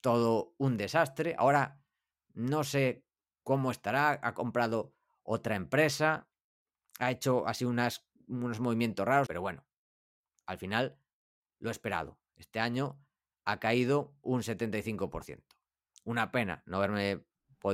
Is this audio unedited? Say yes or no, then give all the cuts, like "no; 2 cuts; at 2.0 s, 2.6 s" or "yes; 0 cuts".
no; 1 cut; at 9.3 s